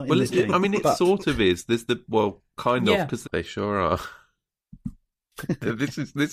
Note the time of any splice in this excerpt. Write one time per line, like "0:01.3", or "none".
0:03.2